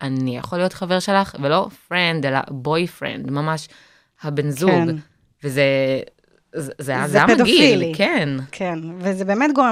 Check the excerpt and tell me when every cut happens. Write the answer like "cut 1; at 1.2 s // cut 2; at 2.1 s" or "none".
none